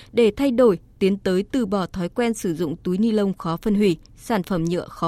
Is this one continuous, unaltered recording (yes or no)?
yes